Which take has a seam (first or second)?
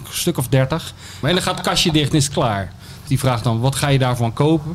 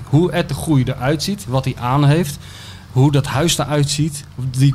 first